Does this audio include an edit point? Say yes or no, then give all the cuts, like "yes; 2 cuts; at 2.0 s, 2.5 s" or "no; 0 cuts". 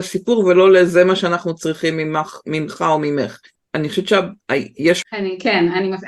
yes; 2 cuts; at 3.6 s, 5.0 s